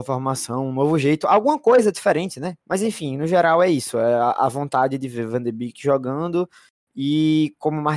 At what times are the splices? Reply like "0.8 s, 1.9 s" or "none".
2.6 s